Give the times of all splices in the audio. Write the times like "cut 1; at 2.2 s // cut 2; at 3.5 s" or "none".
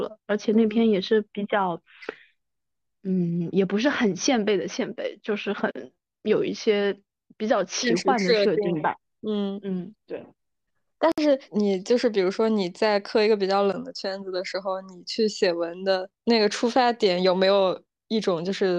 cut 1; at 10.0 s // cut 2; at 11.5 s // cut 3; at 16.1 s